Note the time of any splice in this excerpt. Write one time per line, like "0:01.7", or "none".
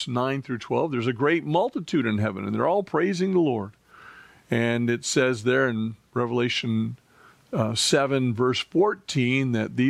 none

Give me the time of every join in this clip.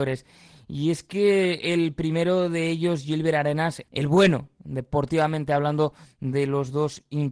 0:03.8

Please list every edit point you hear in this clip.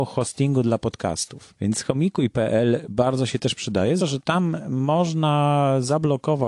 0:01.6
0:04.0

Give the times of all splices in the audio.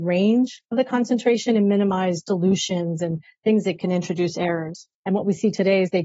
0:05.0

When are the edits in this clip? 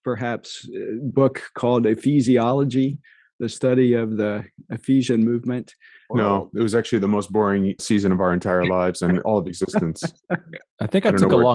0:06.1
0:07.8

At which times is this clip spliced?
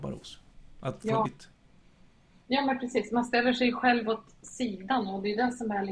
0:01.3

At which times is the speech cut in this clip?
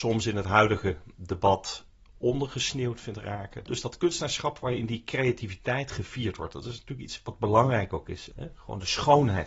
0:03.7
0:08.3

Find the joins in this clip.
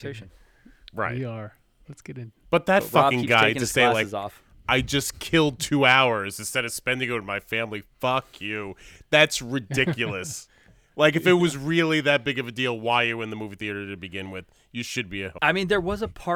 0:15.4

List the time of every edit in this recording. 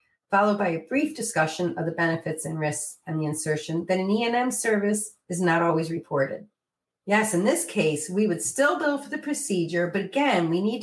0:07.0

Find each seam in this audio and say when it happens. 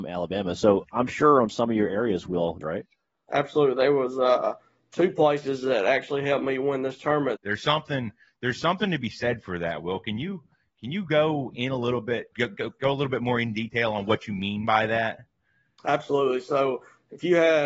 0:02.6
0:07.4
0:12.3

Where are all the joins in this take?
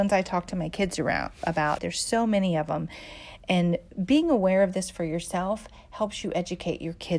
0:01.8

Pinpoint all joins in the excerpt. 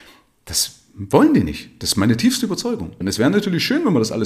0:03.0

